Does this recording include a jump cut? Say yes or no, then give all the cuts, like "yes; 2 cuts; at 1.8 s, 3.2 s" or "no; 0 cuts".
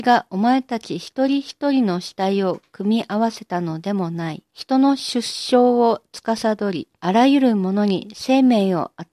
yes; 2 cuts; at 4.5 s, 7.0 s